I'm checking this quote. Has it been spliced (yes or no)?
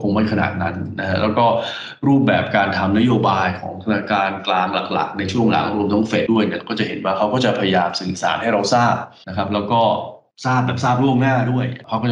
yes